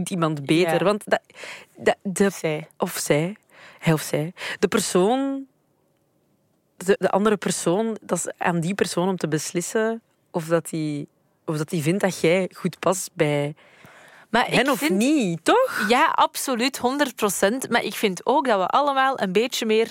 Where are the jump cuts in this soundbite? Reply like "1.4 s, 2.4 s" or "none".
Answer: 7.0 s